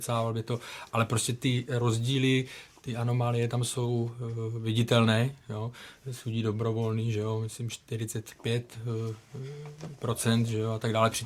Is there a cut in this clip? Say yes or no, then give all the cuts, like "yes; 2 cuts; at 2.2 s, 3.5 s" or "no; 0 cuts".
no; 0 cuts